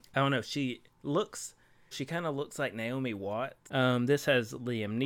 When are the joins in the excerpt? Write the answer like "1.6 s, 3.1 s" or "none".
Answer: 1.9 s, 3.7 s